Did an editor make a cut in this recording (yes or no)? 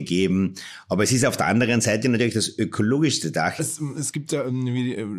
yes